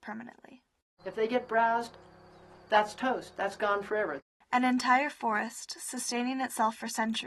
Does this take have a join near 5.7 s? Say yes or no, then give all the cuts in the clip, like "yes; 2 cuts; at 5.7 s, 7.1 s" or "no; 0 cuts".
no; 1 cut; at 1.0 s